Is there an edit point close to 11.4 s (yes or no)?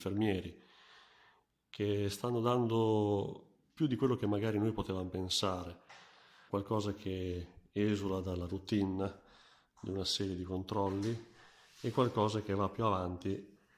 no